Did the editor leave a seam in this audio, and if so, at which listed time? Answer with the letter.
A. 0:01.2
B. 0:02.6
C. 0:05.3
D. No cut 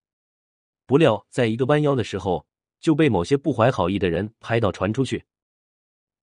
B